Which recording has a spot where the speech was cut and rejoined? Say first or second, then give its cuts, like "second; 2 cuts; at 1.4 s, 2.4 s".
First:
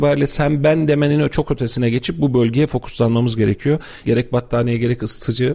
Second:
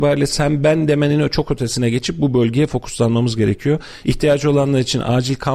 first; 1 cut; at 4.0 s